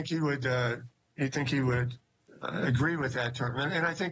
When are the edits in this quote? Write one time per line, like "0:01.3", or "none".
none